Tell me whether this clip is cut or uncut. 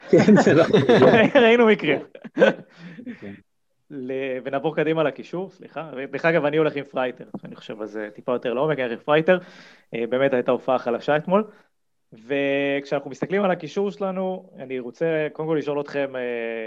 uncut